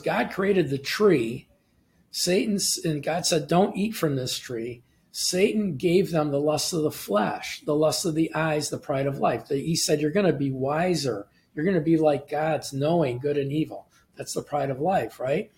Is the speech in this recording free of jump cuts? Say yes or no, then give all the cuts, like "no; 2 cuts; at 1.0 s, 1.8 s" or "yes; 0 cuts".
yes; 0 cuts